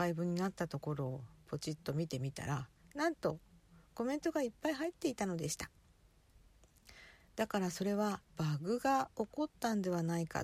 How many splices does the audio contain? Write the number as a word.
one